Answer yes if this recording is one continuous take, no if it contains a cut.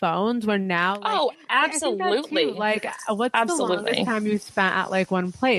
yes